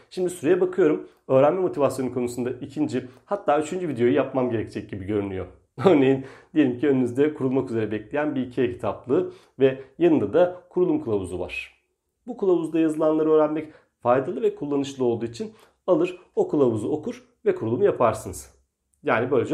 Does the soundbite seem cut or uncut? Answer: cut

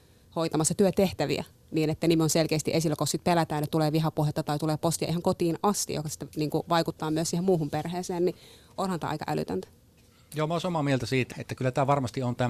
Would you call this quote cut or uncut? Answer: cut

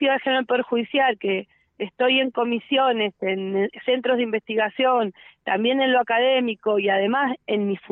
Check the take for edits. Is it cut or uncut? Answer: uncut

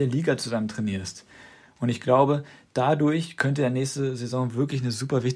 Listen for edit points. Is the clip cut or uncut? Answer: uncut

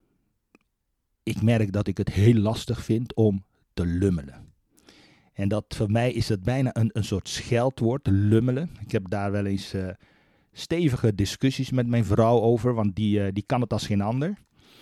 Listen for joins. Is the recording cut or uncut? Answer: uncut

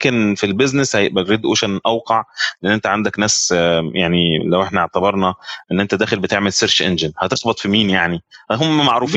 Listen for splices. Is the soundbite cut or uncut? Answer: uncut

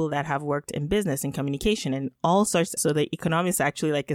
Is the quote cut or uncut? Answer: cut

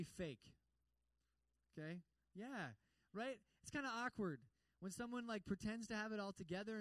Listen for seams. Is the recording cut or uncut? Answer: uncut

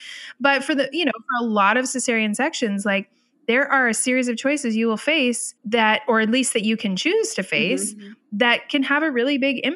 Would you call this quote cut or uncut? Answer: cut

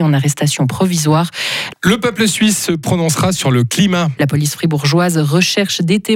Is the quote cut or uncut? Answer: cut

